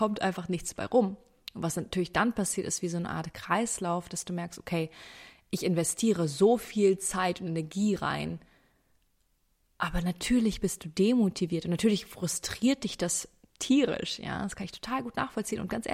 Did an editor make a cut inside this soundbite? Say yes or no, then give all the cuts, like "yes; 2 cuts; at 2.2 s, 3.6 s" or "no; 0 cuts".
no; 0 cuts